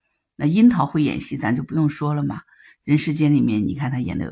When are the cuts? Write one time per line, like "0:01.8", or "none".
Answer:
none